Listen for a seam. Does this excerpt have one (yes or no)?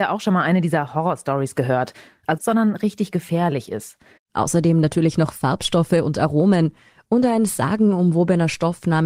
yes